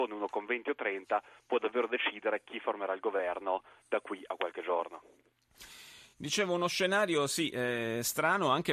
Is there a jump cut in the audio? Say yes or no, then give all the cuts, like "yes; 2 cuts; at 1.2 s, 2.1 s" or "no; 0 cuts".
no; 0 cuts